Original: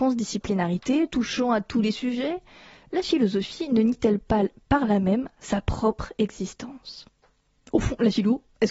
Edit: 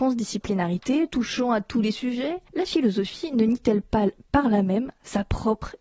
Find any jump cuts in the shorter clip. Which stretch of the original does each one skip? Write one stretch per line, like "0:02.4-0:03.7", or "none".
0:02.5-0:02.9